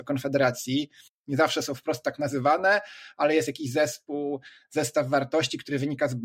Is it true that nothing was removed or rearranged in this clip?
no; 1 cut; at 1.1 s

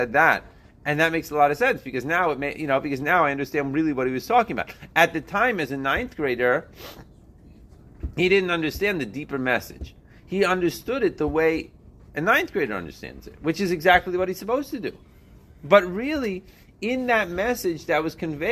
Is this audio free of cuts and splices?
yes; 0 cuts

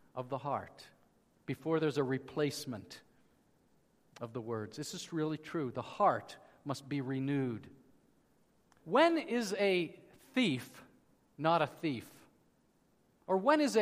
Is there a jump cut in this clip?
yes; 1 cut; at 8.8 s

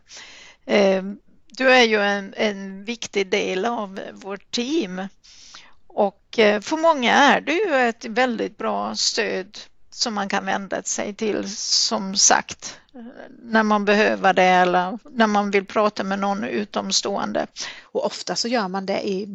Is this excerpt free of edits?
no; 1 cut; at 17.8 s

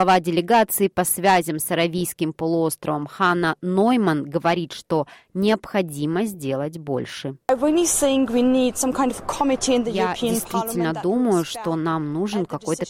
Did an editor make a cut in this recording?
yes; 1 cut; at 7.4 s

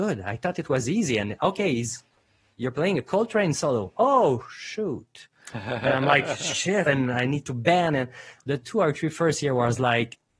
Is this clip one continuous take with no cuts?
no; 1 cut; at 6.9 s

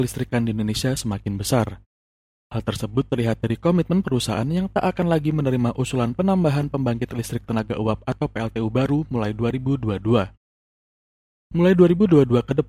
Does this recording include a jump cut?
no; 0 cuts

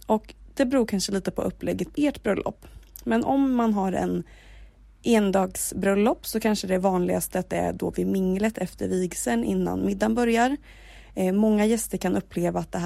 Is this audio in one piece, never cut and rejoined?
no; 1 cut; at 1.9 s

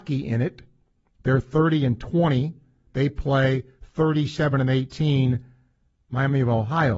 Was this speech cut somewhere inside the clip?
no; 0 cuts

